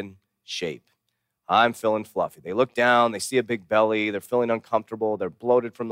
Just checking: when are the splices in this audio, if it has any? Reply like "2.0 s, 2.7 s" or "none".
none

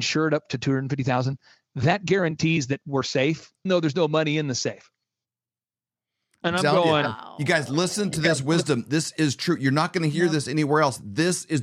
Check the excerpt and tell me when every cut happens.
3.7 s

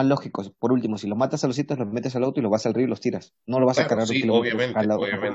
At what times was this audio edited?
none

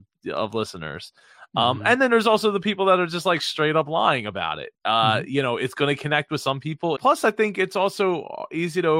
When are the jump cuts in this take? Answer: 4.7 s, 6.9 s

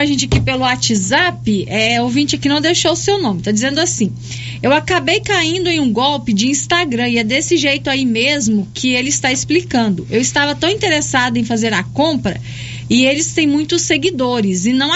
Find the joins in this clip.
none

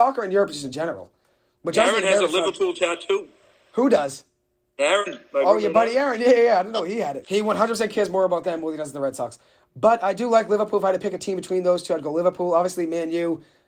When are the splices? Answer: 7.2 s

